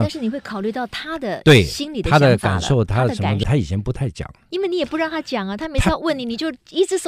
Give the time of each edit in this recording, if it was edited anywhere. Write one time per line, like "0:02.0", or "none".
0:03.4